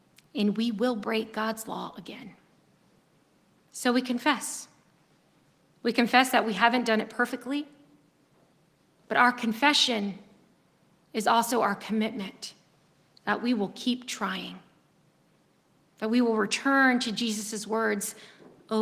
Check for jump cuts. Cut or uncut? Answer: uncut